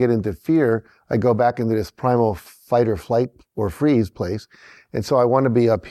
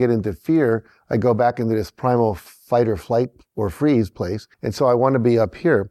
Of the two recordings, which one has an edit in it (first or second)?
second